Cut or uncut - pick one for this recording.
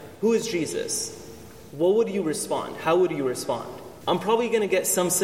cut